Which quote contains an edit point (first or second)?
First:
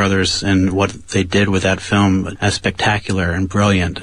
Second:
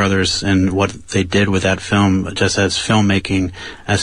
first